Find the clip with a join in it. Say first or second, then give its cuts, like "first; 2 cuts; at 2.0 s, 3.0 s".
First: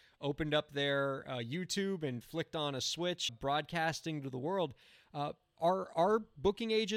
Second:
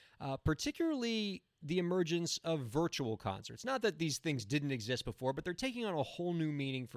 first; 1 cut; at 3.3 s